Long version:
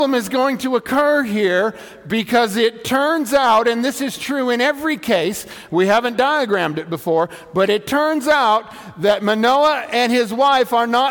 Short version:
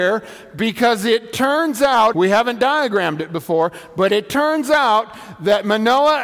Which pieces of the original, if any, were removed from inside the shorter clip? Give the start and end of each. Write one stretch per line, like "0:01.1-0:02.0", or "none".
0:03.6-0:05.7